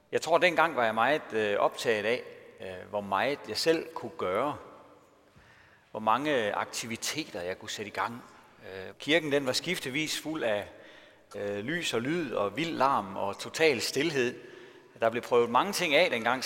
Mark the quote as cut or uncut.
cut